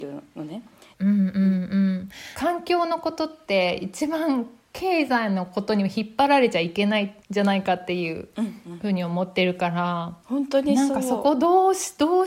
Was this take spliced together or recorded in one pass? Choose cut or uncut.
cut